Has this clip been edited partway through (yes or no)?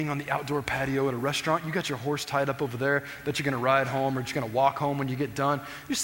no